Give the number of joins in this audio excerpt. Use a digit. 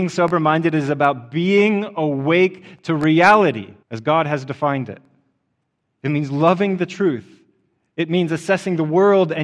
1